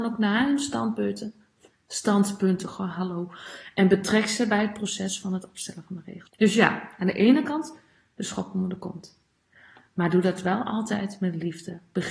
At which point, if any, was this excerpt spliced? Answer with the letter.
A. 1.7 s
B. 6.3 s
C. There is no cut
B